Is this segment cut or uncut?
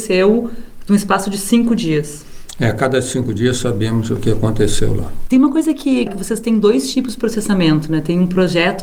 cut